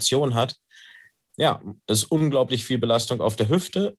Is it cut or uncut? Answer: uncut